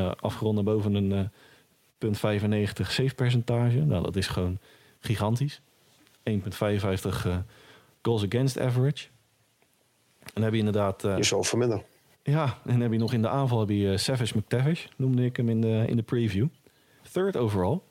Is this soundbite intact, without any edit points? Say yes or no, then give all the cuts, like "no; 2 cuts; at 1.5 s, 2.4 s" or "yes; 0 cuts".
yes; 0 cuts